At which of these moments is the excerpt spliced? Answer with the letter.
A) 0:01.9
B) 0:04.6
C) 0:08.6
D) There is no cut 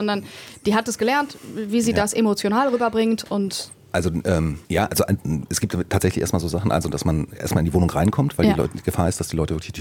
B